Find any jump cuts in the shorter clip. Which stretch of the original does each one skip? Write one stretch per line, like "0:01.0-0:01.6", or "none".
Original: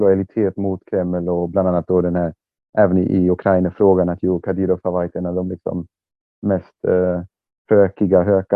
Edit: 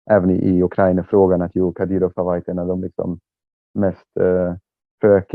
none